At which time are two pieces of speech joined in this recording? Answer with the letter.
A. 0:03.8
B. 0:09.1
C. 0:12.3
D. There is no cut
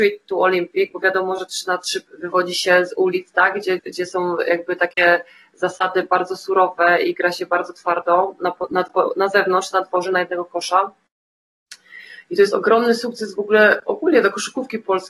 A